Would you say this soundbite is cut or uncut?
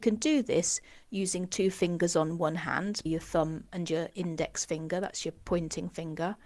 cut